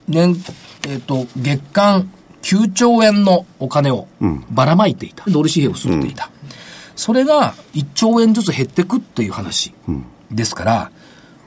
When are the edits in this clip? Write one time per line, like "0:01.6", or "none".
0:05.3